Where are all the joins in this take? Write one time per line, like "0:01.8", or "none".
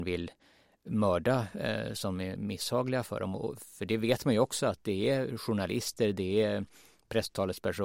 none